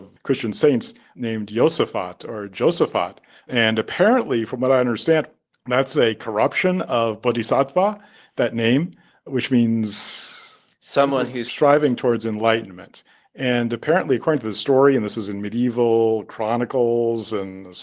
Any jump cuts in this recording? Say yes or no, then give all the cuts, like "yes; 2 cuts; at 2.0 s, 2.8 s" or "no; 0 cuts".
no; 0 cuts